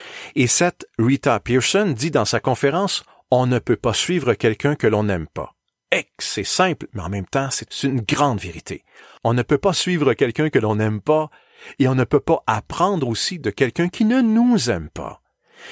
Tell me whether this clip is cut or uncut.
uncut